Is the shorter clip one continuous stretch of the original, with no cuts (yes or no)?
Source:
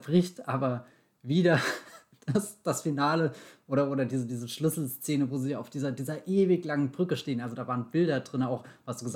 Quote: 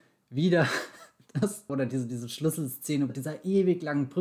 no